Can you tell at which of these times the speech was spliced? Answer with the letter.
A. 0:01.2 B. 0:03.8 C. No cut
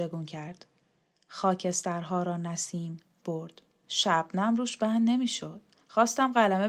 B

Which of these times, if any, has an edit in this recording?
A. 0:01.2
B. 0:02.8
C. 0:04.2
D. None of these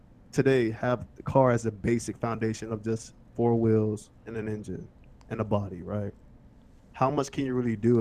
C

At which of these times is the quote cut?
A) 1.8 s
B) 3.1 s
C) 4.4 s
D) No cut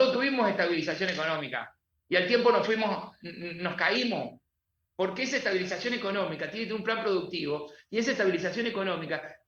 D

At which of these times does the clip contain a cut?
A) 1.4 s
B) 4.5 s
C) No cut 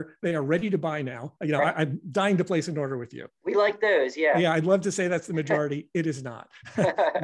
A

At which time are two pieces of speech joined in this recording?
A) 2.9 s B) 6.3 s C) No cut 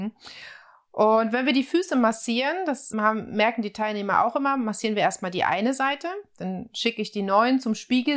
A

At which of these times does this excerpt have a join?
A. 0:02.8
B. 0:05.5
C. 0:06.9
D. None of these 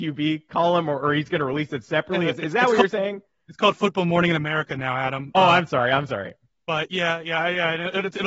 D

